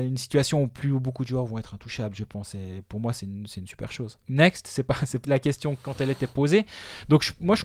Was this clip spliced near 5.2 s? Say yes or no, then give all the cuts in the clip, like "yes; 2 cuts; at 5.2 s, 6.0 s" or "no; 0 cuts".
yes; 2 cuts; at 4.2 s, 5.2 s